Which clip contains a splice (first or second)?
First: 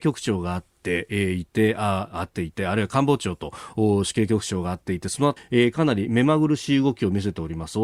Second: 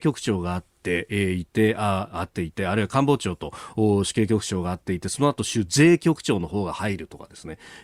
first